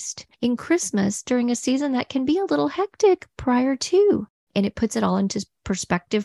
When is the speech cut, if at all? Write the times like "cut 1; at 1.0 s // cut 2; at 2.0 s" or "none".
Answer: cut 1; at 4.5 s